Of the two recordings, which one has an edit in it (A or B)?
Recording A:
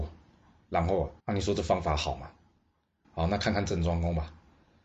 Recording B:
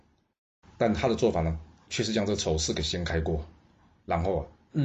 A